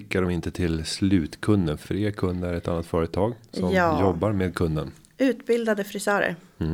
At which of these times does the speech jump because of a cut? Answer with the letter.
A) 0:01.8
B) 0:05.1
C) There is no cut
A